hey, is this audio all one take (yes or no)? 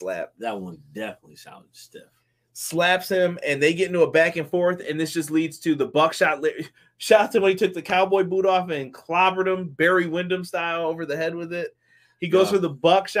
yes